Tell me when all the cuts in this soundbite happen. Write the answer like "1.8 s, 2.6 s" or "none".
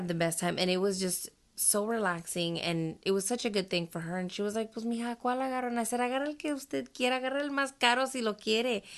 none